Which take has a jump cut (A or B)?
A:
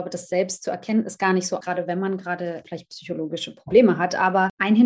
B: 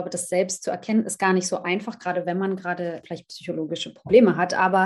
A